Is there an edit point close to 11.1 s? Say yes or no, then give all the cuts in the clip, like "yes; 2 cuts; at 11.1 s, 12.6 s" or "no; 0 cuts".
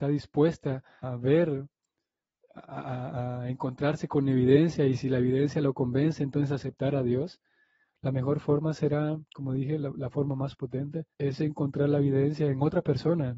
yes; 2 cuts; at 1.0 s, 11.1 s